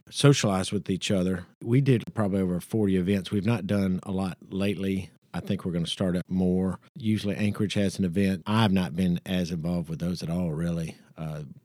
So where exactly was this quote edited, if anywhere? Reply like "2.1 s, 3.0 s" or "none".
8.4 s